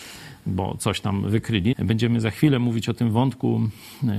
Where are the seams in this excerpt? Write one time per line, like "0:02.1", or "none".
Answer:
0:01.7